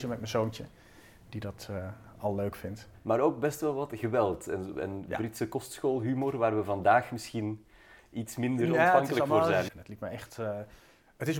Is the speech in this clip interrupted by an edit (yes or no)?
yes